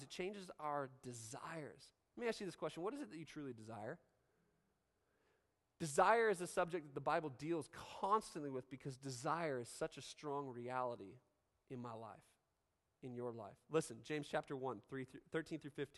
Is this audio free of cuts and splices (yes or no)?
yes